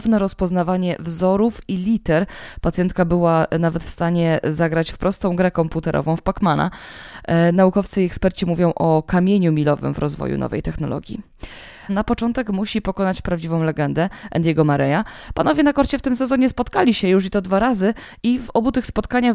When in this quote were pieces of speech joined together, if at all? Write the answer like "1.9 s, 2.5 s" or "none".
11.9 s

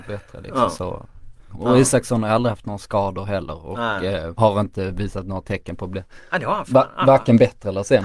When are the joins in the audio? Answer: 1.5 s, 4.3 s

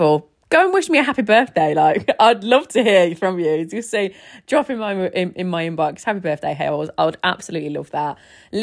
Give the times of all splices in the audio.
none

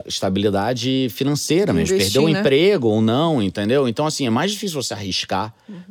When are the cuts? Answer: none

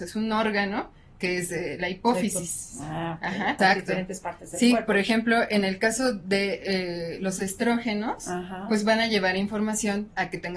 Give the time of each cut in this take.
3.6 s

